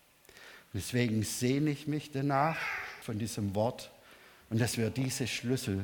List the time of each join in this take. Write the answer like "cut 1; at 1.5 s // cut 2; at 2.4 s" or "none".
cut 1; at 3.0 s